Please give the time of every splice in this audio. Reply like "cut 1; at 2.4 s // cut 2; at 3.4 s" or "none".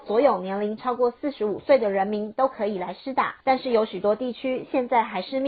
cut 1; at 3.4 s

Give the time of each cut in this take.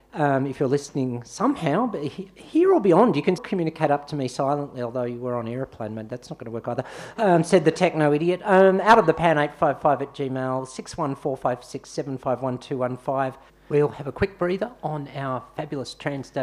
cut 1; at 3.4 s // cut 2; at 13.5 s

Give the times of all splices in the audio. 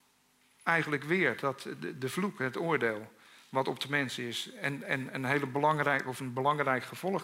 none

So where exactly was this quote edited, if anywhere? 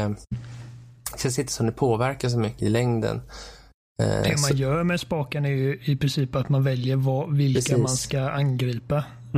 cut 1; at 2.6 s

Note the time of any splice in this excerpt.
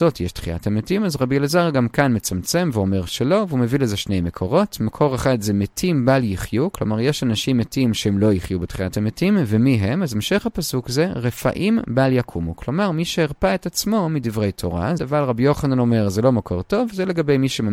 cut 1; at 15.0 s

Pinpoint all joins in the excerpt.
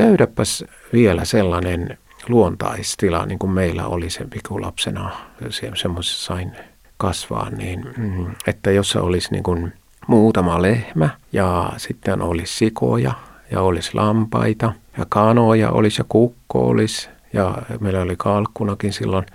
none

